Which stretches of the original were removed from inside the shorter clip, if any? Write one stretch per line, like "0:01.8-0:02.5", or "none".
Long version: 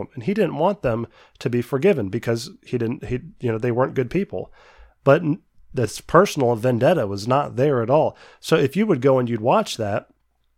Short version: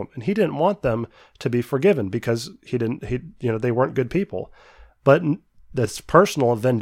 none